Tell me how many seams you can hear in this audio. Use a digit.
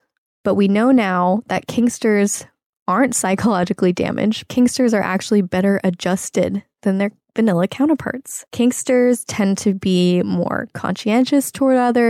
2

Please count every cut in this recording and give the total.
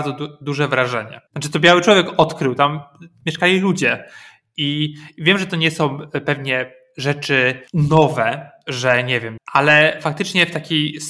3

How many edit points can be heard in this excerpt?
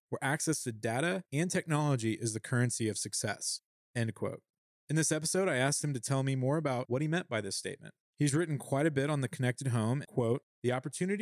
2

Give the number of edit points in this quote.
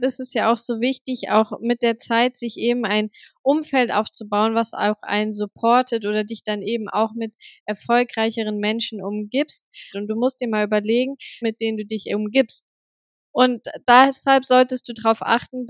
2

